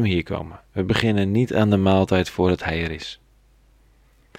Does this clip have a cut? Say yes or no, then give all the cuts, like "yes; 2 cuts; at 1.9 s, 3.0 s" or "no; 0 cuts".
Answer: no; 0 cuts